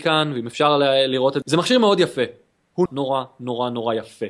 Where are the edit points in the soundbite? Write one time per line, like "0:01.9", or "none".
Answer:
0:01.4
0:02.9